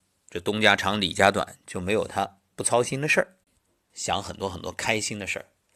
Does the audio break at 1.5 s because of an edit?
no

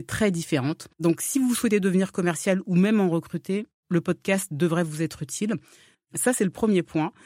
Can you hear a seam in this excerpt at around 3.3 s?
no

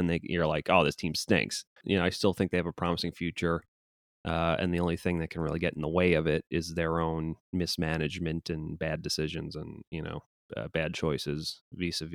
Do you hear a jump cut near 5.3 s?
no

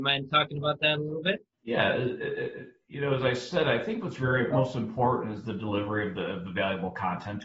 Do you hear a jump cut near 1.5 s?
yes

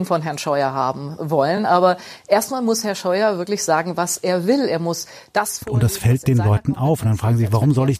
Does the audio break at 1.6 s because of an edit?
no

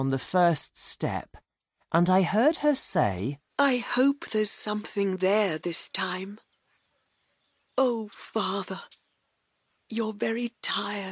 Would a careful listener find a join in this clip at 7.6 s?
no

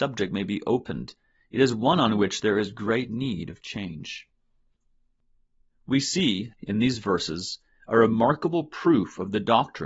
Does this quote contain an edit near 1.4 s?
no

